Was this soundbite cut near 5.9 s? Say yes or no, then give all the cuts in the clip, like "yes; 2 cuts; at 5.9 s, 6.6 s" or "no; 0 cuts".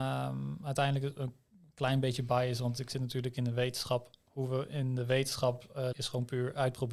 yes; 1 cut; at 5.9 s